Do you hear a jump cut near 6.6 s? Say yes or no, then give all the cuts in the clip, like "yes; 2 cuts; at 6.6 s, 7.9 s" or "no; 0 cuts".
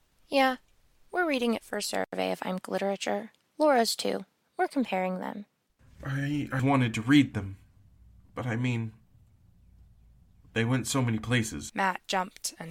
yes; 2 cuts; at 6.6 s, 11.7 s